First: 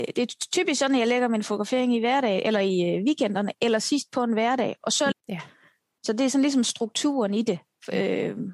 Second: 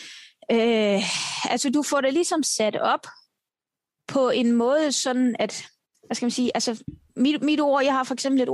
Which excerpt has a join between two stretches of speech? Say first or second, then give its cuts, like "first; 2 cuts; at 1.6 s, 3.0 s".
first; 1 cut; at 5.1 s